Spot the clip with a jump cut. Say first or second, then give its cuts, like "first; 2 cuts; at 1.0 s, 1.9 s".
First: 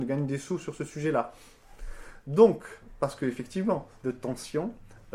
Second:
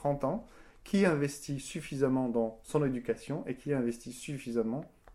first; 1 cut; at 4.0 s